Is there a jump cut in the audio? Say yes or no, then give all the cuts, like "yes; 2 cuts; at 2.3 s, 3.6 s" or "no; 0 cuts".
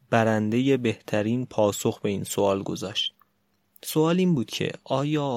no; 0 cuts